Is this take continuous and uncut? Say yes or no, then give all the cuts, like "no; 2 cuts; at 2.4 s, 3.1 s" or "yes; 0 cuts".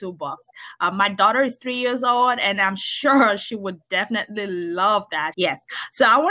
no; 1 cut; at 5.3 s